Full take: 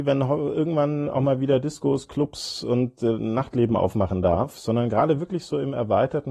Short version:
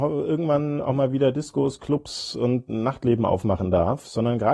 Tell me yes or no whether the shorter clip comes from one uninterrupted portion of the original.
no